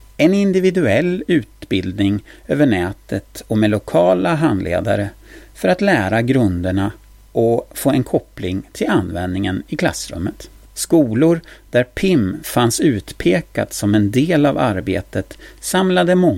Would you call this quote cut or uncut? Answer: cut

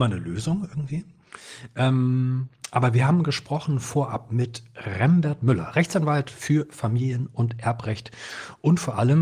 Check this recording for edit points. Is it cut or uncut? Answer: uncut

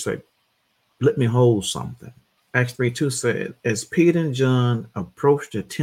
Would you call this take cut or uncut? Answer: cut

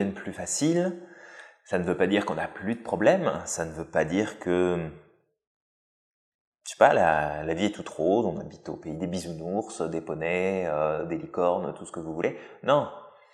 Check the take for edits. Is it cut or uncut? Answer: uncut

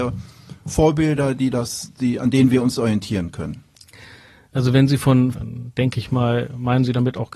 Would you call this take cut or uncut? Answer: cut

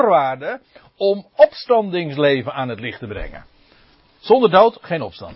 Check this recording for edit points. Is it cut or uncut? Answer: uncut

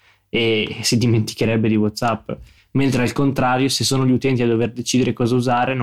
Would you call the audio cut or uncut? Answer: uncut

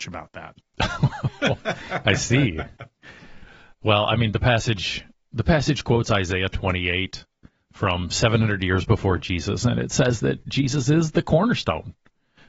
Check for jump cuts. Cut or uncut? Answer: uncut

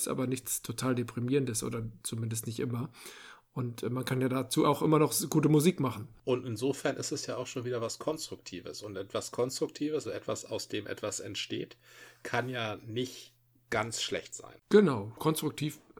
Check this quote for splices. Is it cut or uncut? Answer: cut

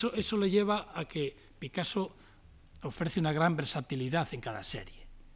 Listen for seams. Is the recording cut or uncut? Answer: uncut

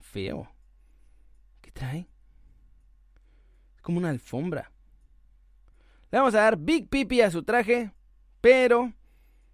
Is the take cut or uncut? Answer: uncut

